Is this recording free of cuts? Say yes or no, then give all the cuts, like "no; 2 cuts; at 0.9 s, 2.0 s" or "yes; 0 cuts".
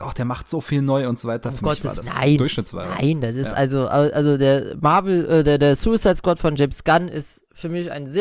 no; 1 cut; at 2.0 s